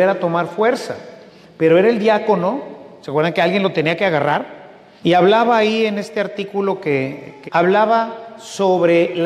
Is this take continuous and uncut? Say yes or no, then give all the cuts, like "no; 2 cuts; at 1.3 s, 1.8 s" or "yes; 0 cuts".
no; 2 cuts; at 5.0 s, 7.5 s